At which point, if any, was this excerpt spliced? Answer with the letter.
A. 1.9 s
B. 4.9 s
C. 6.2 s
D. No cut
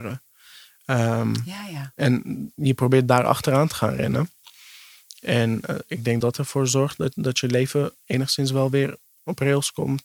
C